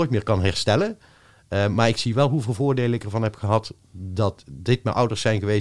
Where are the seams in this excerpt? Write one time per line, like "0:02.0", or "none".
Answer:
none